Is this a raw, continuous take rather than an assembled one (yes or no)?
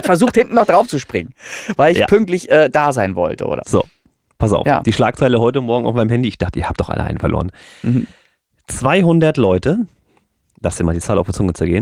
no